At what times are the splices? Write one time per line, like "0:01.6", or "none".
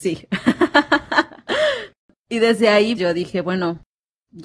0:03.0